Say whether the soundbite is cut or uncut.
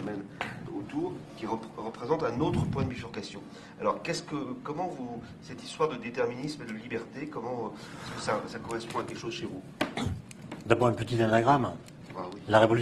uncut